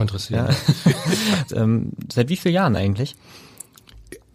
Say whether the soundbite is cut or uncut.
cut